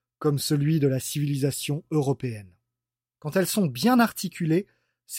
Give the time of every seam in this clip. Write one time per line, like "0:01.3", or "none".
0:03.1